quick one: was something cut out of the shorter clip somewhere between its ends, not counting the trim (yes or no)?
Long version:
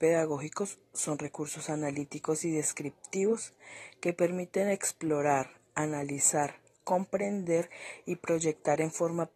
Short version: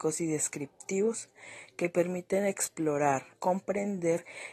yes